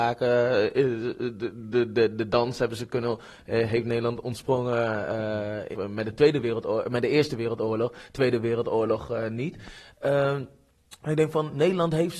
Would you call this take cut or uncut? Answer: cut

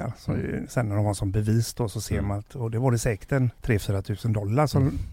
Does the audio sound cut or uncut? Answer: cut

